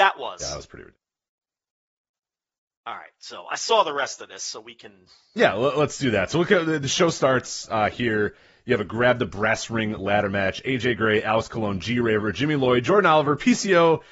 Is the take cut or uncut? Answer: uncut